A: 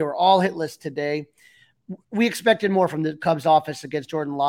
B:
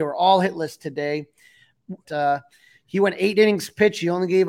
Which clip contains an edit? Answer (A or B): B